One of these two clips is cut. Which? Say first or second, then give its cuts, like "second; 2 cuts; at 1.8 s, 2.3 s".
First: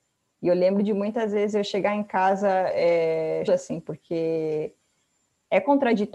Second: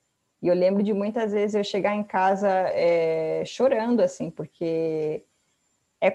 first; 1 cut; at 3.5 s